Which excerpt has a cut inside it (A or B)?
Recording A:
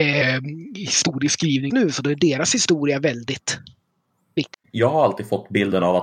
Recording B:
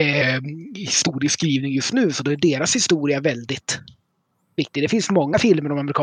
A